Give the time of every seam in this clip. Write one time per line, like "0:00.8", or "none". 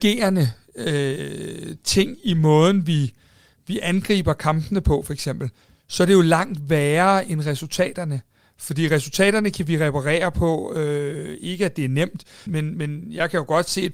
0:12.5